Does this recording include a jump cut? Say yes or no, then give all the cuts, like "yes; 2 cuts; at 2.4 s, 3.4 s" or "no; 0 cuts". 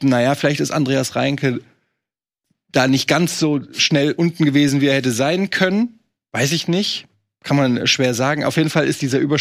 no; 0 cuts